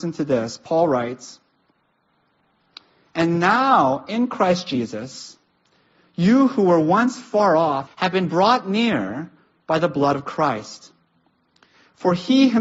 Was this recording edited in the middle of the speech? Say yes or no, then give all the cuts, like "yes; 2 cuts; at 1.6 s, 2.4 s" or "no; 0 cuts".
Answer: yes; 1 cut; at 7.9 s